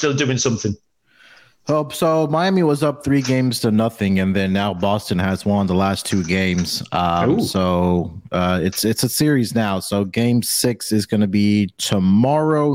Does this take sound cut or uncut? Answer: uncut